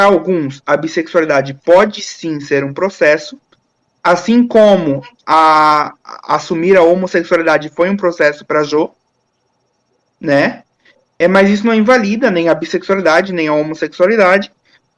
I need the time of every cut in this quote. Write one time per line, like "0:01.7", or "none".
none